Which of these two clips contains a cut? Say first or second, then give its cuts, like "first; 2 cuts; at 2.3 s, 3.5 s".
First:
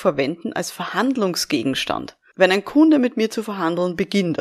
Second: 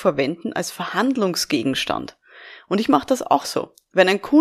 first; 1 cut; at 2.3 s